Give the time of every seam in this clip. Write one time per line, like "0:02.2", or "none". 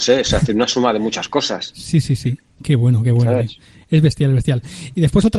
none